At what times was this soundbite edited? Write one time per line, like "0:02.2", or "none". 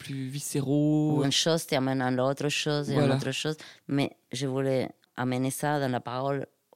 0:01.2
0:03.8